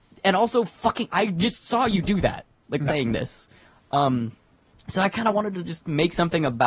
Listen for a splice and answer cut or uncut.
cut